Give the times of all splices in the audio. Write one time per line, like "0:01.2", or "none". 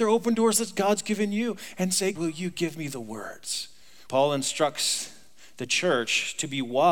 0:02.1
0:04.1